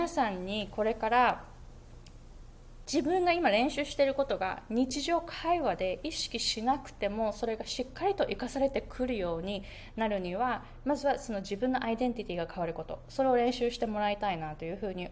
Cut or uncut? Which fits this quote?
uncut